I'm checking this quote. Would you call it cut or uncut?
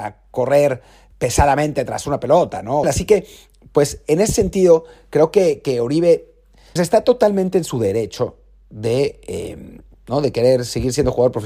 cut